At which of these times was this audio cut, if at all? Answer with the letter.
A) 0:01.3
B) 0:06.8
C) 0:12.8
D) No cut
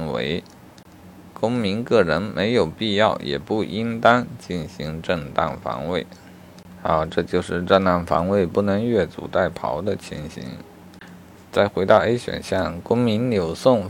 D